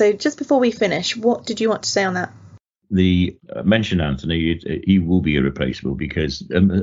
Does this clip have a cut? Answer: no; 0 cuts

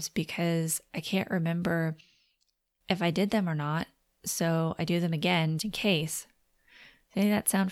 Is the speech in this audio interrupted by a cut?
yes; 1 cut; at 5.6 s

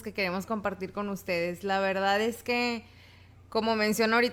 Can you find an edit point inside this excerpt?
no; 0 cuts

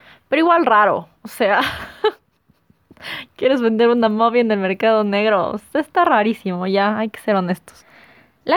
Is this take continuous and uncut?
yes; 0 cuts

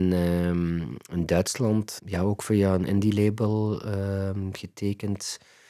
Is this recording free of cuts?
no; 1 cut; at 2.0 s

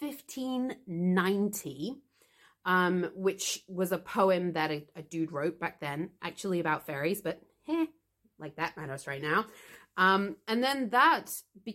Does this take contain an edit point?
no; 0 cuts

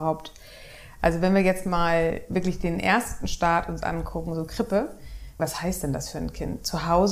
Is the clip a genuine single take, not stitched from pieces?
no; 1 cut; at 5.4 s

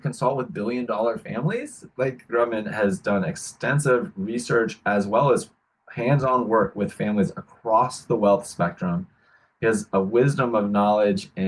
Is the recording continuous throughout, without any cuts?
no; 1 cut; at 2.3 s

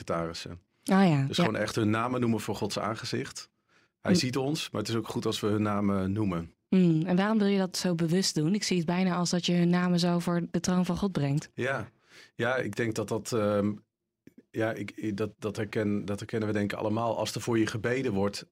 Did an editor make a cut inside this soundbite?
no; 0 cuts

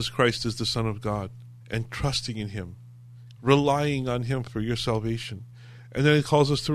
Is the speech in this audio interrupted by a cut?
yes; 2 cuts; at 1.6 s, 3.4 s

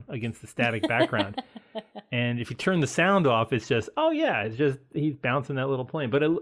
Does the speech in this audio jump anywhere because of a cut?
no; 0 cuts

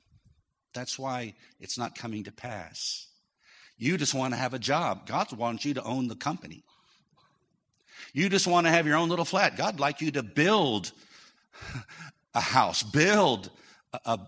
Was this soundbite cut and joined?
no; 0 cuts

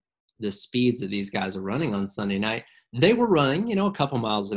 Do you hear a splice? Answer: no; 0 cuts

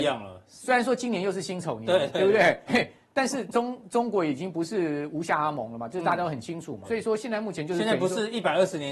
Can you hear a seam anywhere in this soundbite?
yes; 2 cuts; at 2.7 s, 6.8 s

